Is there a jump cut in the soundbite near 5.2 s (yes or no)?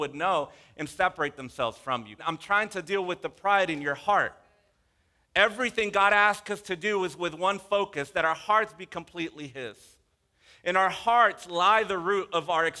no